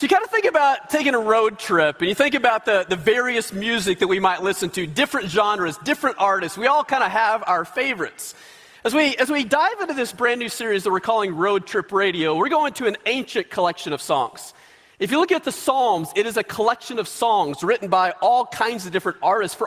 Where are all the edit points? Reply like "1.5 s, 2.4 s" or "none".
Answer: 14.9 s